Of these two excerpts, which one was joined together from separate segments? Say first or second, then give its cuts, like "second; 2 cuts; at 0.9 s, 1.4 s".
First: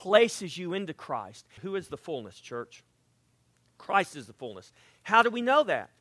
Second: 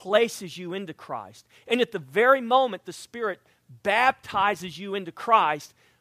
first; 1 cut; at 1.6 s